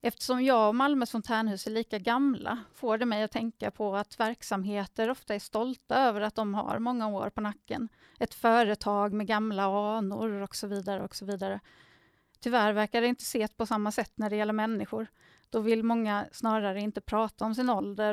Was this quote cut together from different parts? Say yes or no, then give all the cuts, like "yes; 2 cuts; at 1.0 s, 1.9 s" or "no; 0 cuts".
no; 0 cuts